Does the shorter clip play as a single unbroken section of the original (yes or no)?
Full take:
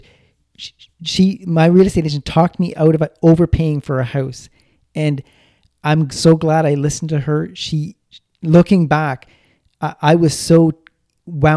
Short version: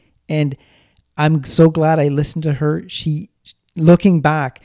yes